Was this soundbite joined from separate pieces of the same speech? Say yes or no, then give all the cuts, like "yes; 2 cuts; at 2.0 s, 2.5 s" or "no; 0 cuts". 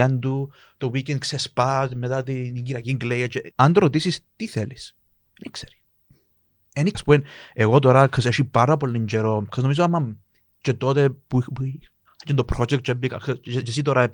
yes; 2 cuts; at 3.5 s, 6.9 s